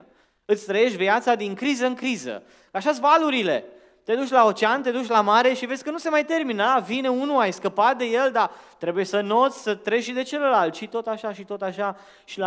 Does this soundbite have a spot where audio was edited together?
no; 0 cuts

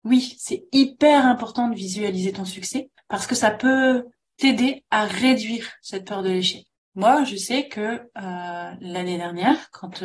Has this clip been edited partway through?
no; 0 cuts

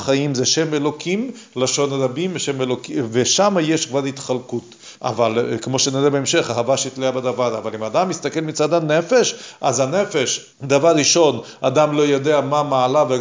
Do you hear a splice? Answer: yes; 2 cuts; at 5.0 s, 10.5 s

